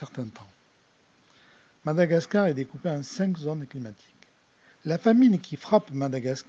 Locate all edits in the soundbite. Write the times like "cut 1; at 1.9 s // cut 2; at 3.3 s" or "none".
cut 1; at 4.7 s

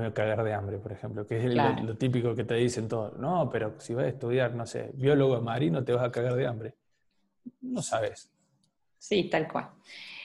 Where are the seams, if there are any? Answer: none

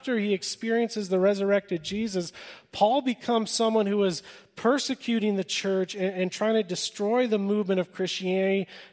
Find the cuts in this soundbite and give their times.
none

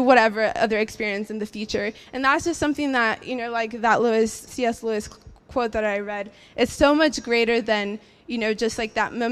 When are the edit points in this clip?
cut 1; at 4.5 s

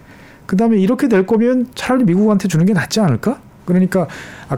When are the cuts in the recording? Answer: cut 1; at 3.6 s

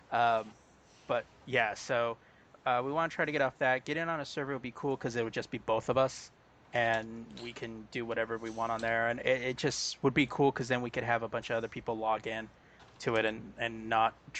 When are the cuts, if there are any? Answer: none

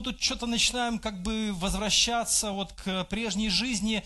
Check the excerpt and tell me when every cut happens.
none

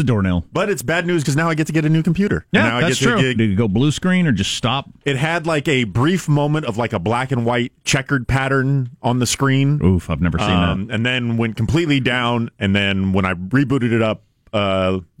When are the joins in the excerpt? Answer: cut 1; at 1.2 s // cut 2; at 3.4 s

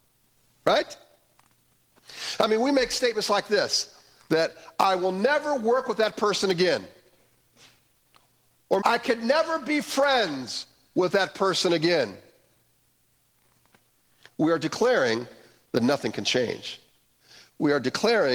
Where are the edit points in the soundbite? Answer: cut 1; at 8.8 s

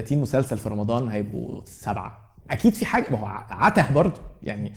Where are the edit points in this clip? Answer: cut 1; at 2.4 s

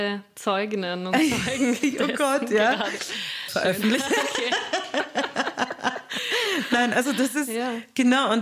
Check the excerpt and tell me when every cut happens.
cut 1; at 3.5 s

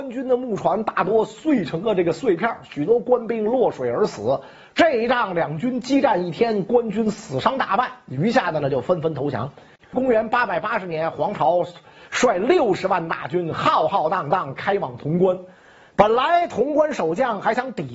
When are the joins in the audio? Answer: cut 1; at 9.8 s

